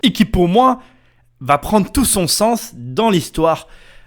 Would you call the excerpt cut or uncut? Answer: uncut